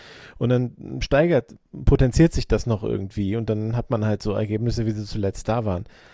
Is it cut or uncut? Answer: uncut